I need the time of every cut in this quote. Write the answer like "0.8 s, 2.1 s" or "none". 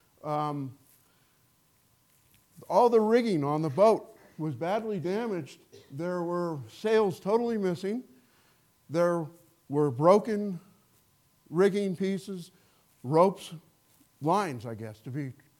none